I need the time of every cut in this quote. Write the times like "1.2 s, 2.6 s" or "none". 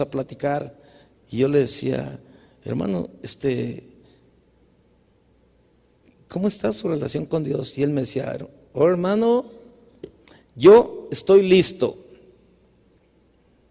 none